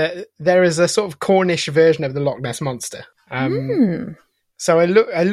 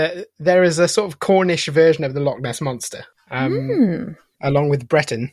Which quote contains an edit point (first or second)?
second